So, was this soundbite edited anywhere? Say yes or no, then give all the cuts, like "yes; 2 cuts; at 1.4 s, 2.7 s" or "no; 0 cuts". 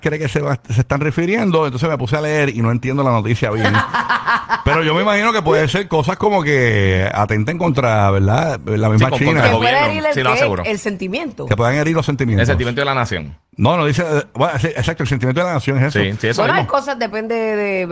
yes; 1 cut; at 13.5 s